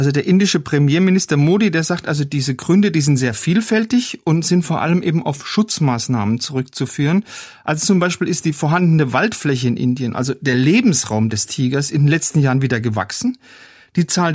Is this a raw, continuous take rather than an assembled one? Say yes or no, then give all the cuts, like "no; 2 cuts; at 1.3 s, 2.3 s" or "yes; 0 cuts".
yes; 0 cuts